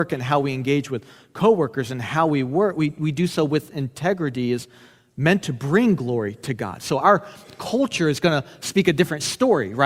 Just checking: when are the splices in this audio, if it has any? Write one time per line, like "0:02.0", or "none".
none